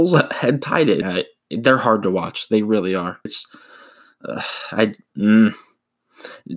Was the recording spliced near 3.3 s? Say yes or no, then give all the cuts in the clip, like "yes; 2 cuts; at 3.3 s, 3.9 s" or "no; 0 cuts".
yes; 2 cuts; at 1.0 s, 3.3 s